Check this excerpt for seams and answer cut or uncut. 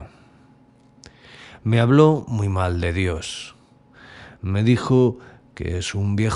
uncut